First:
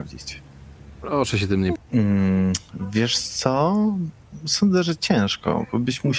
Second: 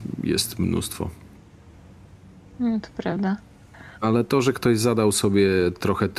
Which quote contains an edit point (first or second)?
first